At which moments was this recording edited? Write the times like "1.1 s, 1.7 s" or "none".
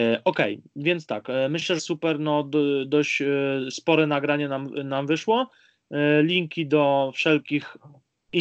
1.8 s